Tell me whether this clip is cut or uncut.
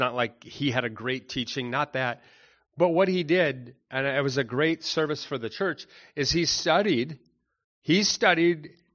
uncut